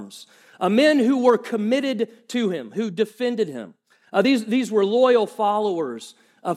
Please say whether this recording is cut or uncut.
uncut